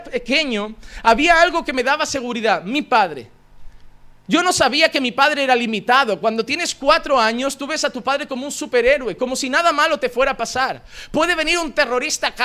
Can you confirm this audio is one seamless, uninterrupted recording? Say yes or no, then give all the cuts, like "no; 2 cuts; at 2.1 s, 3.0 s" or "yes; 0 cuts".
yes; 0 cuts